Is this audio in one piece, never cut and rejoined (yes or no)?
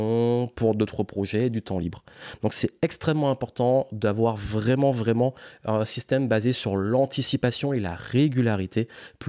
yes